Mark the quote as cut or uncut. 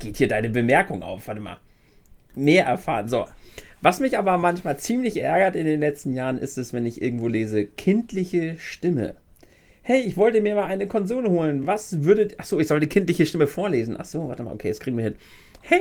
uncut